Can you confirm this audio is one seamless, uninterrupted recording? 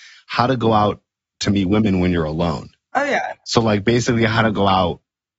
yes; 0 cuts

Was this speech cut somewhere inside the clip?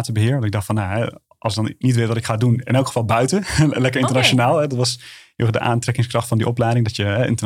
no; 0 cuts

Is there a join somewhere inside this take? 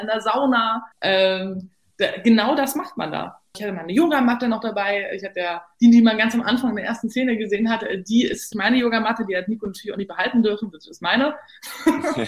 yes; 2 cuts; at 0.9 s, 8.5 s

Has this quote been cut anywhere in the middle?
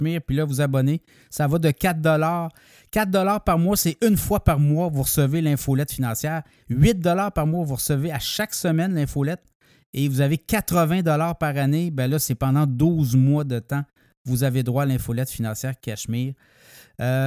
no; 0 cuts

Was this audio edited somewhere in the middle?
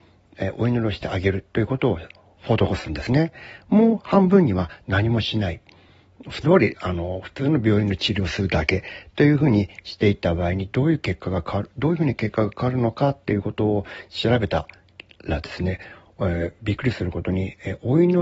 yes; 1 cut; at 6.4 s

